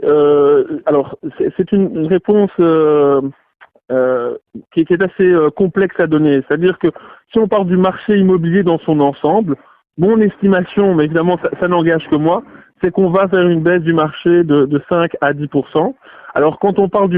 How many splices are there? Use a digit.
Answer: 0